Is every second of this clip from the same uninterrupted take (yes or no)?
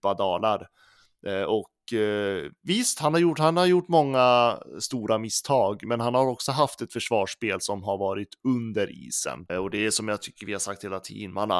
no